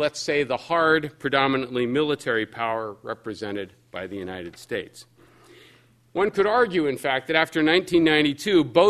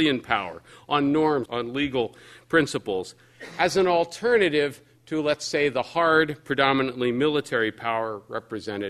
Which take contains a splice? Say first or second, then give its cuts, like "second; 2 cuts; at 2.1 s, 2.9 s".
second; 1 cut; at 1.5 s